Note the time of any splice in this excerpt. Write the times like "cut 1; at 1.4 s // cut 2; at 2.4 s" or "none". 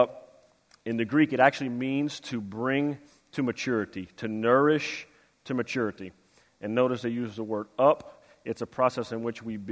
none